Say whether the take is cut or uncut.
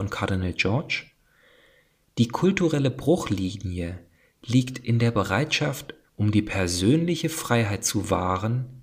cut